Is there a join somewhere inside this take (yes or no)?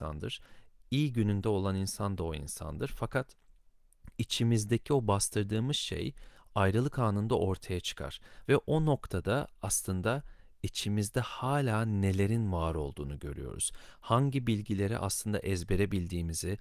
yes